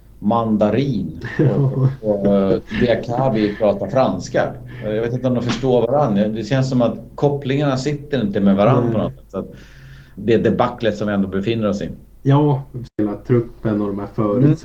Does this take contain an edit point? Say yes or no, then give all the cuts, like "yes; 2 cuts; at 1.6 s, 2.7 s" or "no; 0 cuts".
yes; 2 cuts; at 10.2 s, 12.9 s